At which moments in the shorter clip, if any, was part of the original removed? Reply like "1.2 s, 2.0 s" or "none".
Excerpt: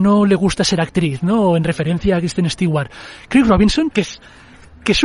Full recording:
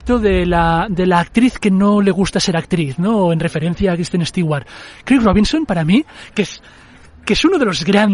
3.9 s

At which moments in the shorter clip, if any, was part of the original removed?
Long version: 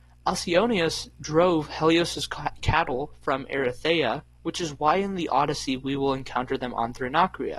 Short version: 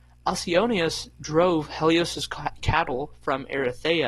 none

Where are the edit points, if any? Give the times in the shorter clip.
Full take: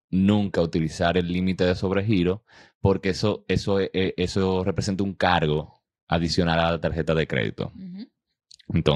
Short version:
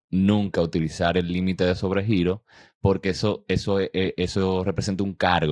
none

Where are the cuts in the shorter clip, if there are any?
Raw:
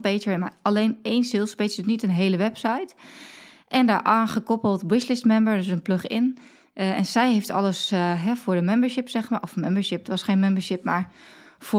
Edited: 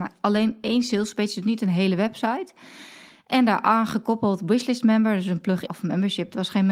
5.7 s

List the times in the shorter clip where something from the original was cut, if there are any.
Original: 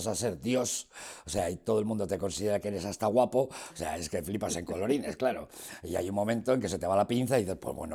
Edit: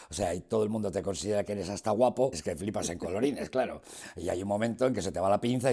2.3 s

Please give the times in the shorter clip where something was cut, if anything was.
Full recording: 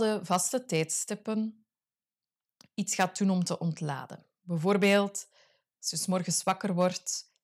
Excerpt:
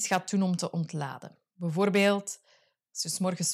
none

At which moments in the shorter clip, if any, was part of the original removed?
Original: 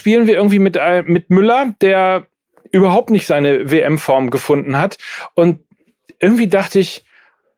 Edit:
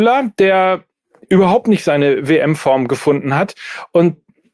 none

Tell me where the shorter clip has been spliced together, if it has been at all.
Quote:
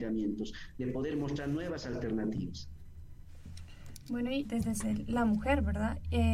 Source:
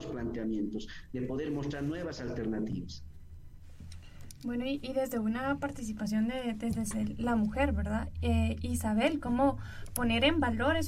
4.4 s

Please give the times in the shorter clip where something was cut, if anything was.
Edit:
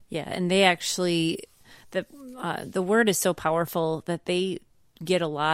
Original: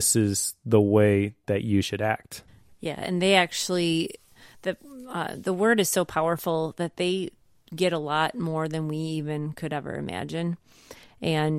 none

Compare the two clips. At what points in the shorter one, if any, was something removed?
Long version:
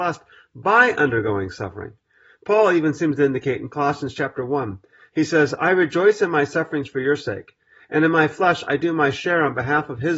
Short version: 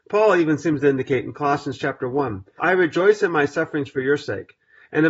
2.6 s

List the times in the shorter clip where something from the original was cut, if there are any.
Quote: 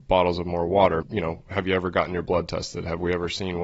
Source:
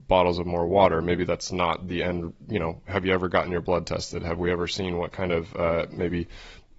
1.0 s

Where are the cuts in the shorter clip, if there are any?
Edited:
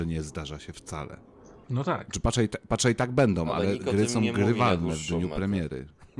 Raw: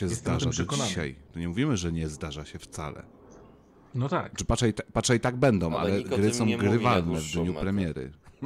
1.6 s

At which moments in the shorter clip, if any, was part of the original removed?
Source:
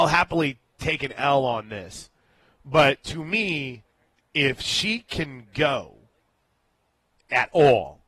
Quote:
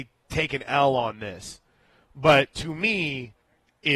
none

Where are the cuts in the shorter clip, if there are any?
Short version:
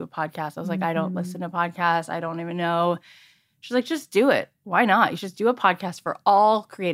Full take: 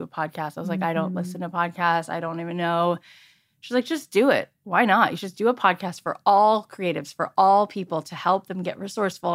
none

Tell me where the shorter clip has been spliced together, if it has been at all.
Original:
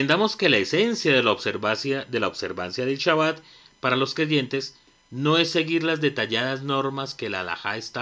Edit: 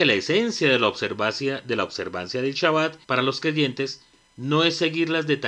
3.0 s

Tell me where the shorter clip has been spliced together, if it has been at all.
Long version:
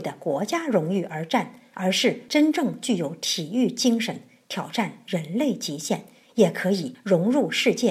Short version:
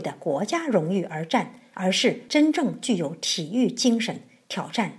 none

